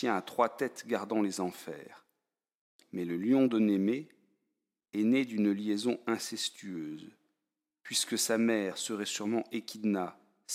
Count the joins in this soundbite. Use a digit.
0